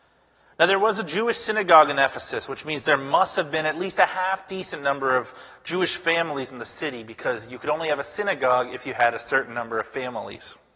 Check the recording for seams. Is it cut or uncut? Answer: uncut